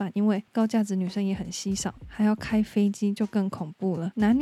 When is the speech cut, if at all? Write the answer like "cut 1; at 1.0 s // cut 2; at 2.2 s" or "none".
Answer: cut 1; at 2.0 s